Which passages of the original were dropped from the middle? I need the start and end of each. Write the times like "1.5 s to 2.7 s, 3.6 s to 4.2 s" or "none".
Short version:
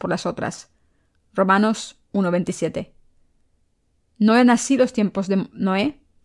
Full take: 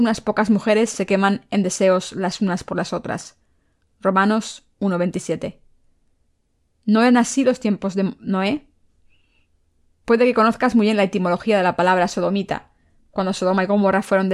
none